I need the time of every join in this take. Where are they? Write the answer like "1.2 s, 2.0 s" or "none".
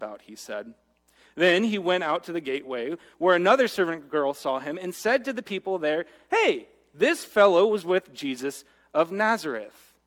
none